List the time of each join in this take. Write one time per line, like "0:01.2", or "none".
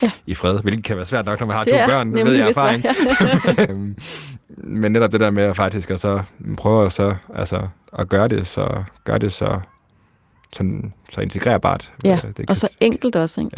0:03.7